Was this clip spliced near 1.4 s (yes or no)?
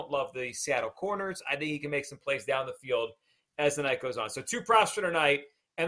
no